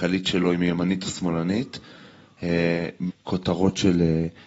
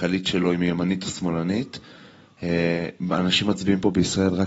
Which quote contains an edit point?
first; 1 cut; at 3.1 s

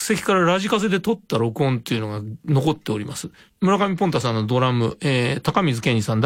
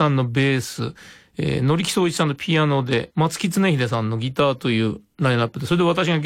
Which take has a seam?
first; 1 cut; at 3.5 s

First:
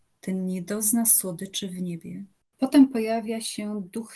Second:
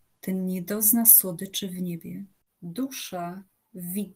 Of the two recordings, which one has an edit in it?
second; 1 cut; at 2.5 s

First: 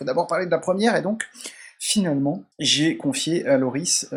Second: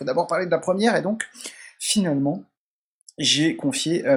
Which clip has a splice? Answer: first; 1 cut; at 2.5 s

